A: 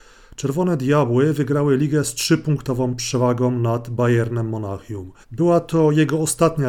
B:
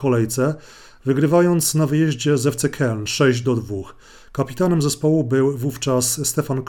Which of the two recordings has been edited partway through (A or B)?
A